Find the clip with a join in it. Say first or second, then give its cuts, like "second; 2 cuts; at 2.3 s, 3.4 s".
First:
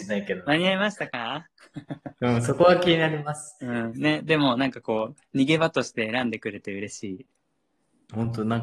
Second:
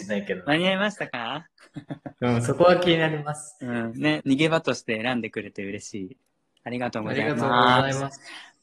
second; 2 cuts; at 4.2 s, 6.6 s